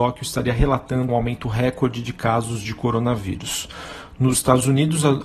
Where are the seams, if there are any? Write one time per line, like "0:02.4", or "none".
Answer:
0:01.1